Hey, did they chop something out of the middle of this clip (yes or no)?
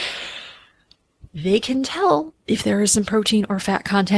yes